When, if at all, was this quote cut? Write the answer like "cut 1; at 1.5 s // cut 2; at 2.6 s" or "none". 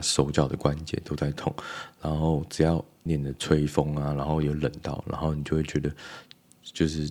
cut 1; at 3.1 s